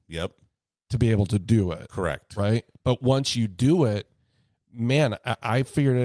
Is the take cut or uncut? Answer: uncut